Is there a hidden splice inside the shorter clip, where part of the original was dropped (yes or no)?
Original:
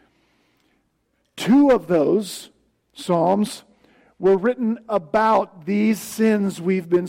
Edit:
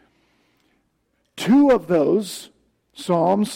no